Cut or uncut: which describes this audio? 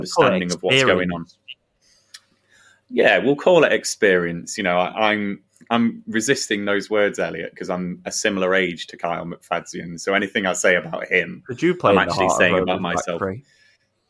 uncut